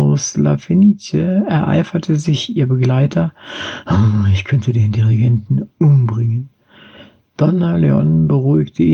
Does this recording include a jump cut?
no; 0 cuts

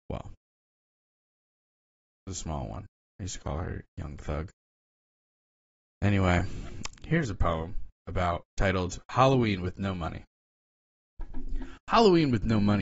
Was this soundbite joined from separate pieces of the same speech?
yes; 2 cuts; at 6.9 s, 8.5 s

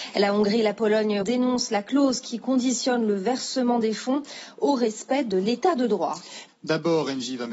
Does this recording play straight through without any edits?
no; 2 cuts; at 1.2 s, 6.5 s

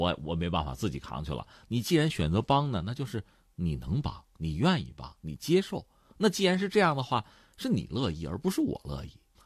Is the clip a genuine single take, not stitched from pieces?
yes; 0 cuts

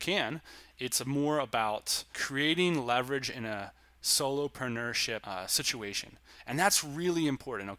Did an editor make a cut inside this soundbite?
no; 0 cuts

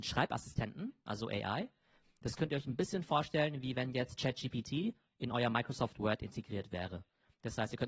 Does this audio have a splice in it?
no; 0 cuts

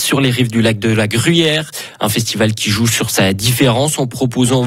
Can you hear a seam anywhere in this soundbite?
no; 0 cuts

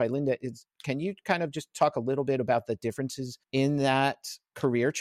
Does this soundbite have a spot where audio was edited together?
no; 0 cuts

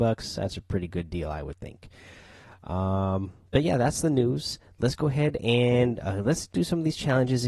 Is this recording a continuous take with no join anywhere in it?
yes; 0 cuts

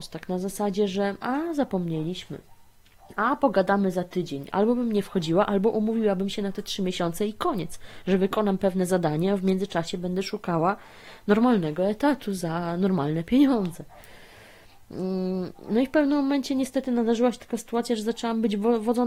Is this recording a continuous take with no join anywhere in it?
no; 1 cut; at 4.5 s

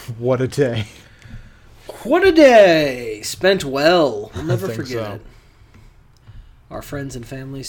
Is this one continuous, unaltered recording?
yes; 0 cuts

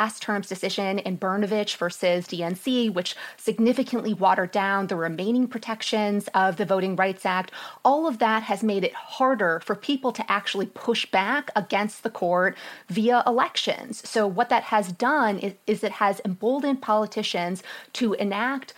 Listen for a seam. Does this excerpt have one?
no; 0 cuts

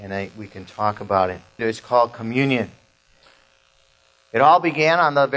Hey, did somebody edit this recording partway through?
yes; 1 cut; at 1.6 s

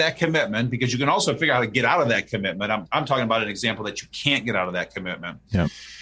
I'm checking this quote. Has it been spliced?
yes; 1 cut; at 2.9 s

